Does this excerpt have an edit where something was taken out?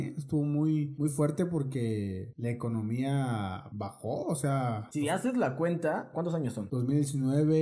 yes; 1 cut; at 6.1 s

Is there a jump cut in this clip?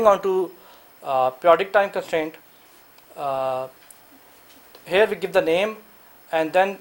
no; 0 cuts

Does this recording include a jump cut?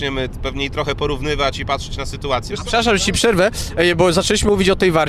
yes; 1 cut; at 2.5 s

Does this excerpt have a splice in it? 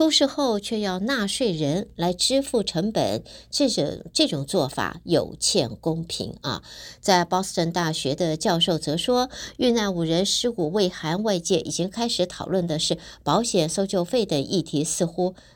no; 0 cuts

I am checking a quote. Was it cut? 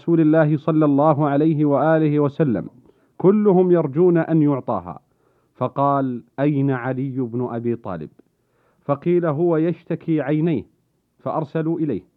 yes; 1 cut; at 6.3 s

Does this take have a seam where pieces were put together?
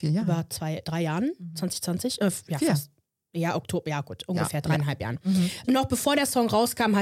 no; 0 cuts

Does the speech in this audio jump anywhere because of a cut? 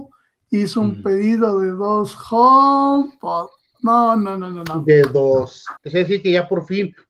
yes; 1 cut; at 5.8 s

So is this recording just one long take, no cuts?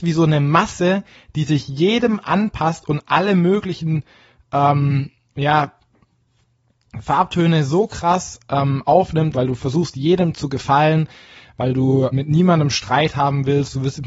no; 2 cuts; at 9.3 s, 12.1 s

